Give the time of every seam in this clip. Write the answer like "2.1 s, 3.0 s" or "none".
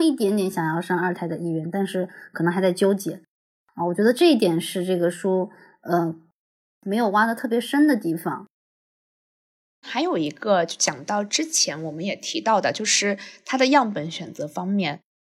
none